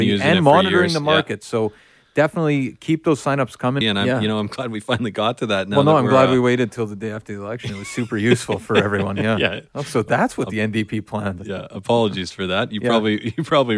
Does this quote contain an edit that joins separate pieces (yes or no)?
yes